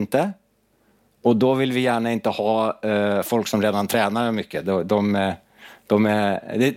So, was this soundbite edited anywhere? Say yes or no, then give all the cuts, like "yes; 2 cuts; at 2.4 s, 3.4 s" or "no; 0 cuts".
no; 0 cuts